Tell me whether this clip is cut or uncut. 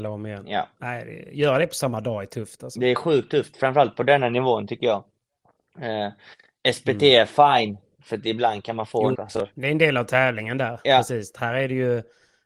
cut